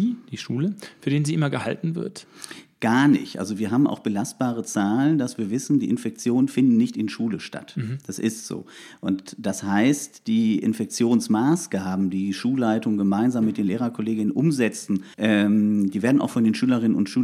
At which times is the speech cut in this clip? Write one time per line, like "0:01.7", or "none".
0:15.1